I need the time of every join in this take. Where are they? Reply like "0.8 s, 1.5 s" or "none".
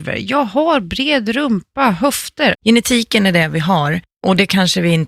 2.5 s